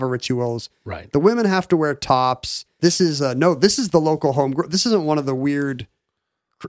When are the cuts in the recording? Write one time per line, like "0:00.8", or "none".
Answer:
0:02.8